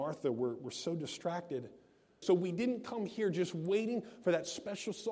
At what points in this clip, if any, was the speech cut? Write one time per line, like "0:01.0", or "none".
0:02.2